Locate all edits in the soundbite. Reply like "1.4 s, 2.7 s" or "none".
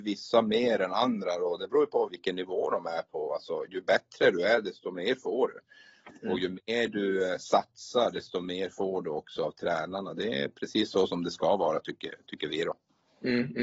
2.1 s